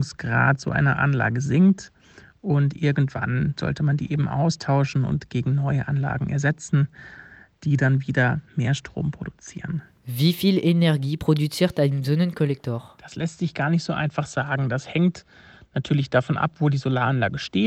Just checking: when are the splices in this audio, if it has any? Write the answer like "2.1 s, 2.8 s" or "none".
none